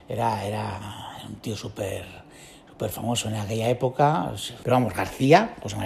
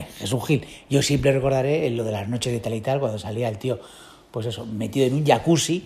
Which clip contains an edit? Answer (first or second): first